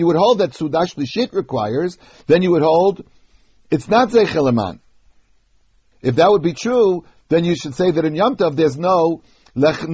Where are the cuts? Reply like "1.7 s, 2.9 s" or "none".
5.9 s